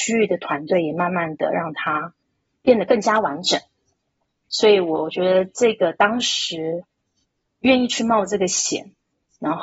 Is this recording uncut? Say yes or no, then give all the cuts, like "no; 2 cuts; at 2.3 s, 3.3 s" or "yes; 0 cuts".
yes; 0 cuts